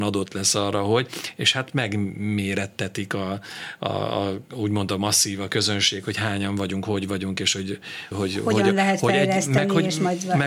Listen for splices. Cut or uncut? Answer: cut